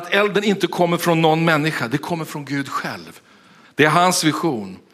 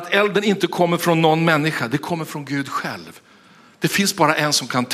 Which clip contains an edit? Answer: first; 1 cut; at 3.6 s

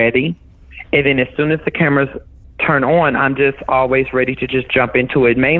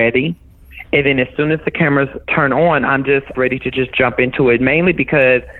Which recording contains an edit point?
second; 2 cuts; at 2.2 s, 3.3 s

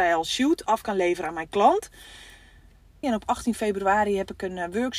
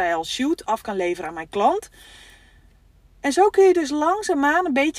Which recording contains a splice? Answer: first; 1 cut; at 3.0 s

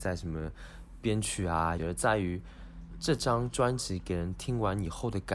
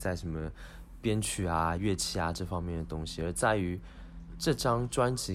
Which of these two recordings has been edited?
first; 1 cut; at 1.8 s

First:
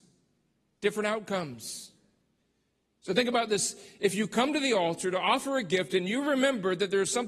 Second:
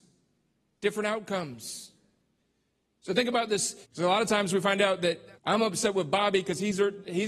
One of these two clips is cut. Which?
second; 2 cuts; at 3.8 s, 5.4 s

